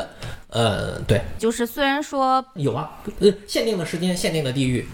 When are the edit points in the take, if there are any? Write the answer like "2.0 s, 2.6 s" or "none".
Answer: 1.4 s, 2.6 s

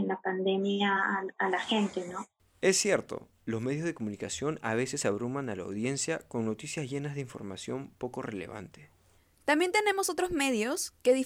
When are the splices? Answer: none

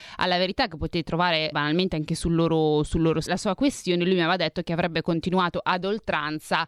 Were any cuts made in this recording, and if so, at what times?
1.5 s, 3.3 s

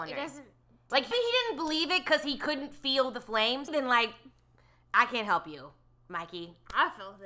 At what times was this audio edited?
1.1 s, 3.7 s

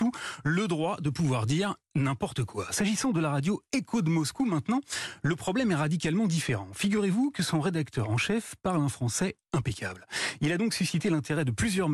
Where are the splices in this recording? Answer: none

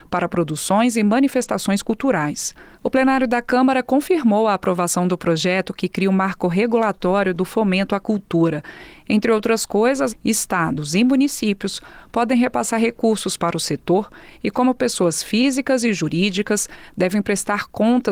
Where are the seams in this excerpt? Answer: 2.7 s, 10.1 s

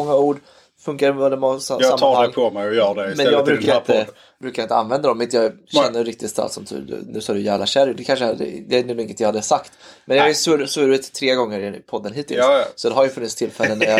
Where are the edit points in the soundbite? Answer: none

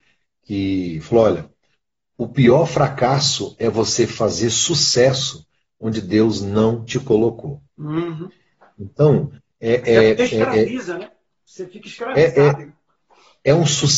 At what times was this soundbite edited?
none

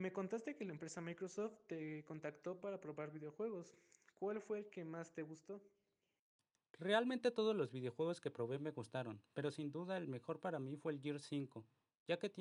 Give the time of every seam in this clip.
none

